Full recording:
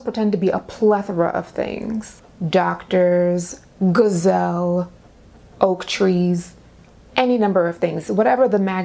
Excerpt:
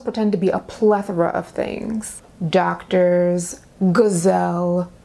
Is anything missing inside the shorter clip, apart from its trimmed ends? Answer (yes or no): no